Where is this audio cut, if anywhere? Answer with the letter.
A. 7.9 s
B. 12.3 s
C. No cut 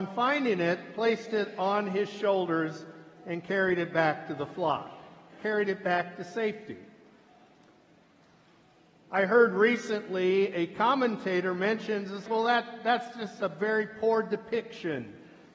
B